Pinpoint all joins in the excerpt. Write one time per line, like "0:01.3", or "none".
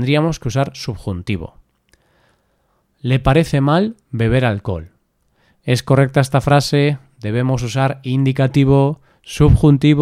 none